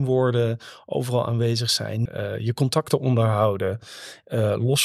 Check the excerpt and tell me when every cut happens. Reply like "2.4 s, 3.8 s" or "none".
2.1 s